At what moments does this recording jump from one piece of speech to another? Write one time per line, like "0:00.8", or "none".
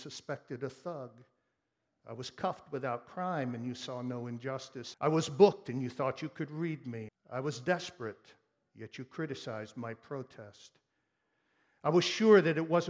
0:04.9
0:07.1